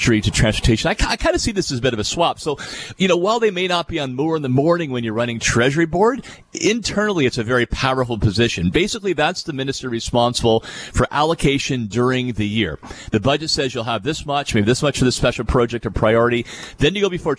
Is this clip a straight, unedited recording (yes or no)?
yes